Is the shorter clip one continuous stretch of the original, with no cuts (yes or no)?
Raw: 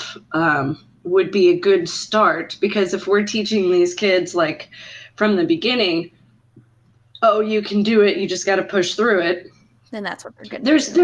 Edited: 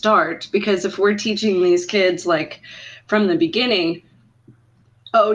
yes